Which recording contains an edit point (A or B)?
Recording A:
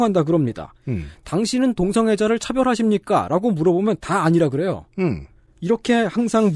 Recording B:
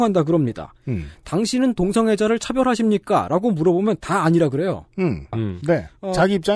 B